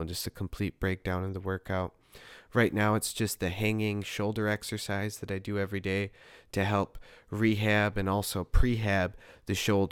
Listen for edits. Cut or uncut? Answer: uncut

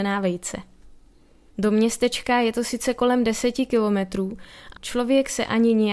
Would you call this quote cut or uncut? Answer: cut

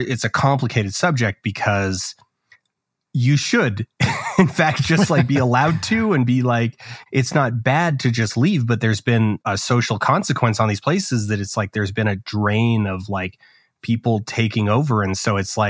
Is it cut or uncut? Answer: uncut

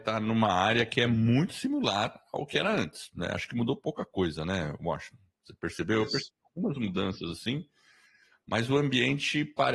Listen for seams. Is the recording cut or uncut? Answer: uncut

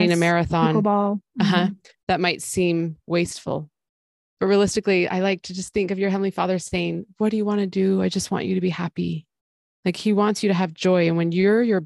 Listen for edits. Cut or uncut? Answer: uncut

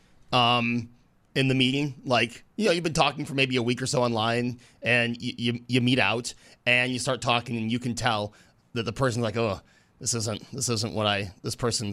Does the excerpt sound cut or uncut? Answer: uncut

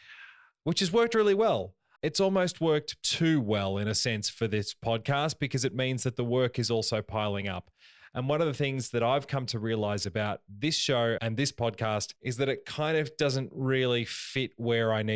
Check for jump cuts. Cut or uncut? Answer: cut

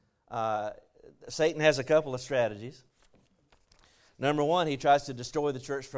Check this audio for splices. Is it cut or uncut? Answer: uncut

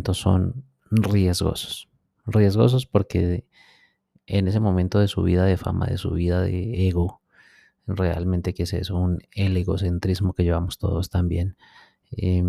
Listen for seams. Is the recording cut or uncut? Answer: uncut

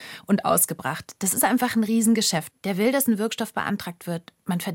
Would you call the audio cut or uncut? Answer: cut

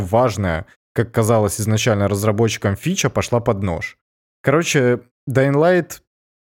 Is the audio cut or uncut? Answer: uncut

